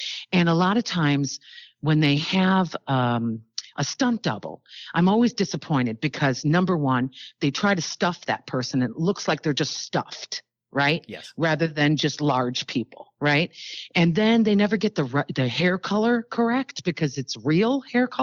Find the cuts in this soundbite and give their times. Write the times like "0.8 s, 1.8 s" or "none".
none